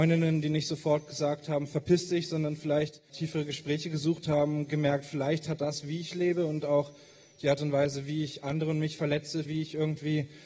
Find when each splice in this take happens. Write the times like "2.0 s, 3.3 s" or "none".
9.5 s